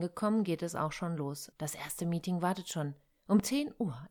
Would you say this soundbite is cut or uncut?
cut